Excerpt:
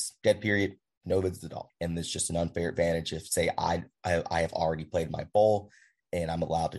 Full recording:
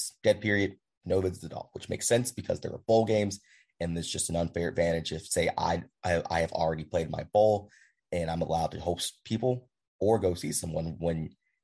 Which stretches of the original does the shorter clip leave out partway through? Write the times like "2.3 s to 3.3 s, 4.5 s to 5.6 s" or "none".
1.7 s to 3.7 s